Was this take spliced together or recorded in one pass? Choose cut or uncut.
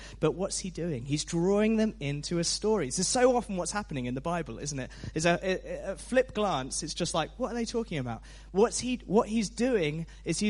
uncut